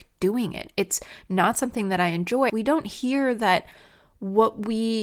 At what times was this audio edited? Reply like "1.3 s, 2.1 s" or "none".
2.5 s